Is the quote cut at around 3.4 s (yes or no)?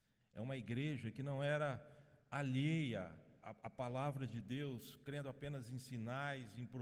yes